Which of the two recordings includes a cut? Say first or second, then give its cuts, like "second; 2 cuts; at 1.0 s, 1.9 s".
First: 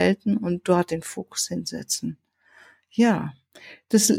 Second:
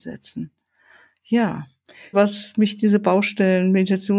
second; 1 cut; at 2.1 s